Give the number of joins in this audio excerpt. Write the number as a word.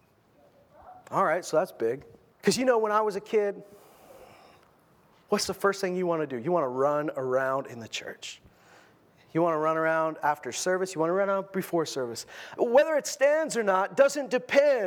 two